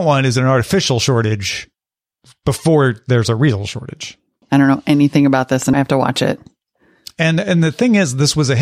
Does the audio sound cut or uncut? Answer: cut